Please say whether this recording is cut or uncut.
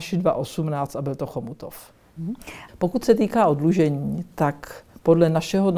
cut